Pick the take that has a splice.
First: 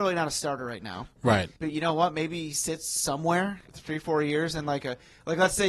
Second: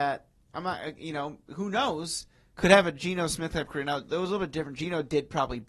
first; 2 cuts; at 1.5 s, 3.6 s

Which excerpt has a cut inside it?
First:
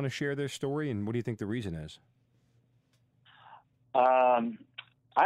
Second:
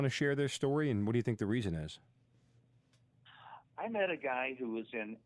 second; 1 cut; at 3.7 s

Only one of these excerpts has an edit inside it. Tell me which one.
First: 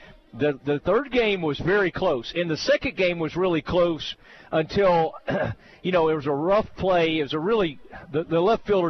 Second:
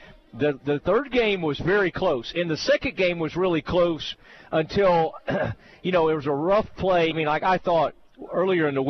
second; 1 cut; at 7.1 s

